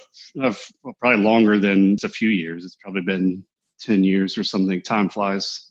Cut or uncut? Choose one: cut